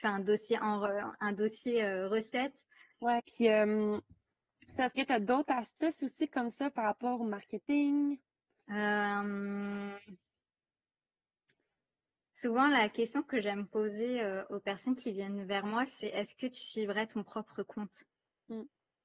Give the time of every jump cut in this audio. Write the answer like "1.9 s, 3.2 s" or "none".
3.2 s